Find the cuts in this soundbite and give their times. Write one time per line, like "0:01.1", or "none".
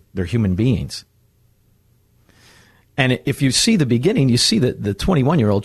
none